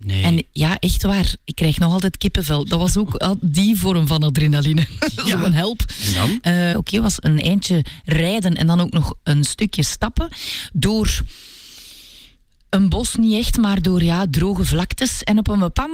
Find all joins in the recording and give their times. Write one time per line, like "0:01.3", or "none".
0:06.7